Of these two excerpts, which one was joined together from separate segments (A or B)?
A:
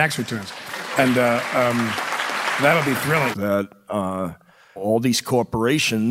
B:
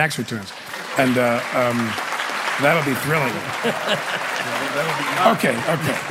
A